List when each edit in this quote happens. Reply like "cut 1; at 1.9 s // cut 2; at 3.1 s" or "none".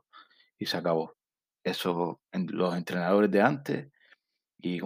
none